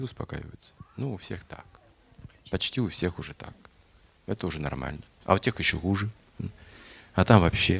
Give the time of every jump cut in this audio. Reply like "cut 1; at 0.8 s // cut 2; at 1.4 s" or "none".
none